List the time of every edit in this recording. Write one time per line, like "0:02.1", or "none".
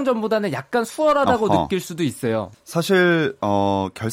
0:02.5